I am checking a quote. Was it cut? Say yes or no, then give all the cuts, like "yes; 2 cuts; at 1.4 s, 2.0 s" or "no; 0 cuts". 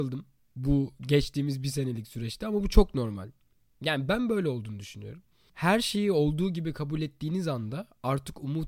no; 0 cuts